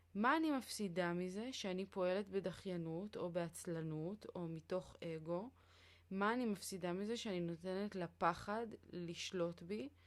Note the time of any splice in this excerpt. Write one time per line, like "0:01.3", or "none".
none